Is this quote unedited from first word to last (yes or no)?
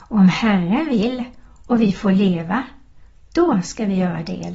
yes